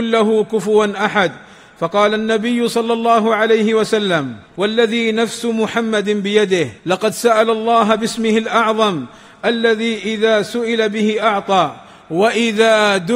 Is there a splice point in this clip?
yes; 2 cuts; at 4.5 s, 6.8 s

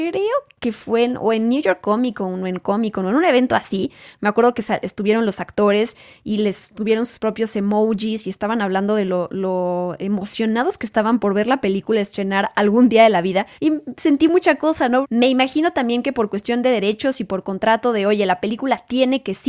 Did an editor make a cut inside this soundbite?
yes; 2 cuts; at 13.5 s, 15.0 s

